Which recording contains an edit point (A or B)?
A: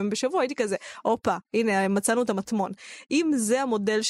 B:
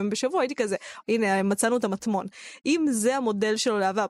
B